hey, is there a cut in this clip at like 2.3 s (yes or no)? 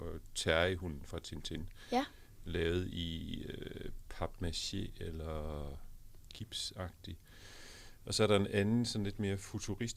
no